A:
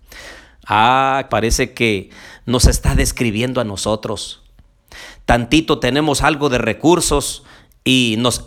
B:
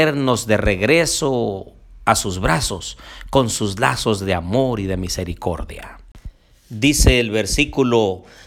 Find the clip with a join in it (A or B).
A